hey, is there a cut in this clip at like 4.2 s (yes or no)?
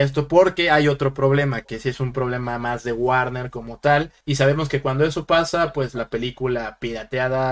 yes